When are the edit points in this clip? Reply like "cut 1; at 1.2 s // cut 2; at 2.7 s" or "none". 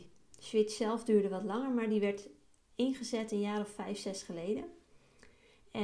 none